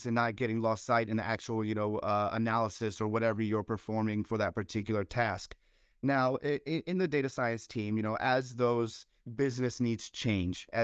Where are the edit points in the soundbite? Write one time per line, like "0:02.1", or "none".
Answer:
none